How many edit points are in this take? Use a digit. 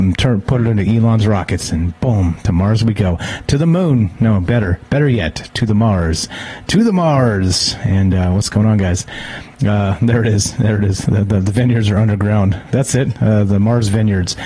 1